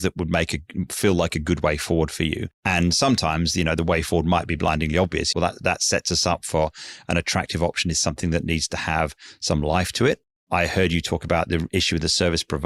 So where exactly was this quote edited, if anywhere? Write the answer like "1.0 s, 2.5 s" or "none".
5.3 s